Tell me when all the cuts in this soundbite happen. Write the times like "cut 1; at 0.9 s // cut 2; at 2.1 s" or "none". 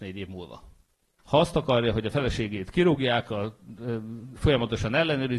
cut 1; at 1.2 s // cut 2; at 4.4 s